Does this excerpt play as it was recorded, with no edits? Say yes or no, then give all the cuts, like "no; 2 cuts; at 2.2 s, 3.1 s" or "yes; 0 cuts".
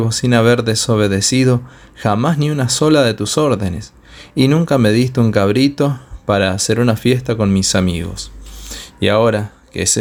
yes; 0 cuts